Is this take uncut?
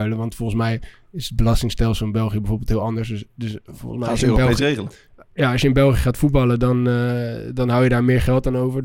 yes; 0 cuts

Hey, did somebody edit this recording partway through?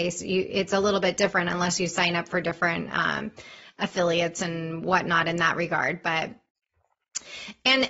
no; 0 cuts

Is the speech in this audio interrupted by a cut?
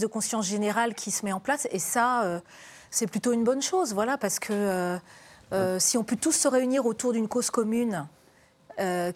yes; 1 cut; at 2.9 s

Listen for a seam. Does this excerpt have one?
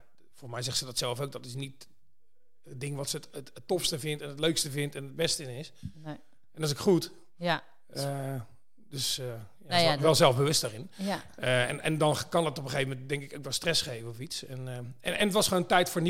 no; 0 cuts

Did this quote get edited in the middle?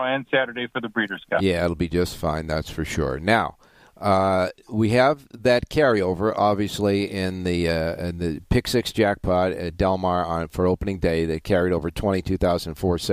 no; 0 cuts

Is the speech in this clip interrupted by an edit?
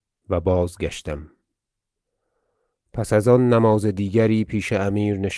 no; 0 cuts

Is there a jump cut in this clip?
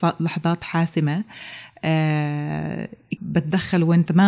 yes; 1 cut; at 3.2 s

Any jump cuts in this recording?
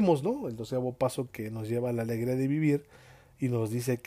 no; 0 cuts

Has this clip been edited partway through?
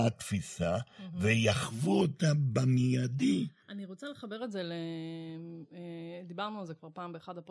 no; 0 cuts

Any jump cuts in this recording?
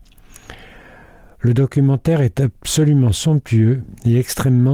no; 0 cuts

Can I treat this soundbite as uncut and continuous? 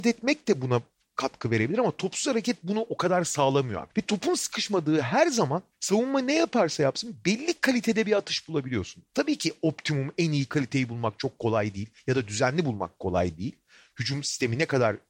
no; 1 cut; at 3.9 s

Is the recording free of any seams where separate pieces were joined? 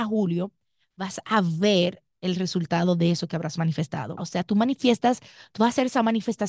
no; 1 cut; at 4.2 s

